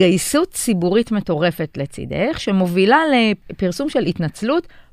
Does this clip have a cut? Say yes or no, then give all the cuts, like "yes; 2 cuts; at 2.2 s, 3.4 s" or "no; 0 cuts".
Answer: no; 0 cuts